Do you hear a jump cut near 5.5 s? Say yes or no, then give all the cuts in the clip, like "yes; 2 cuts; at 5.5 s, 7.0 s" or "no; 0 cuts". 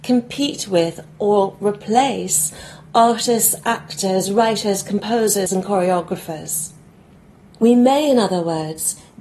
yes; 2 cuts; at 5.5 s, 7.5 s